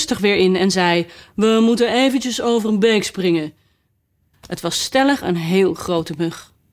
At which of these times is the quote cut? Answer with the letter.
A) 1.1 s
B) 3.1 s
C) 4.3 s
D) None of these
C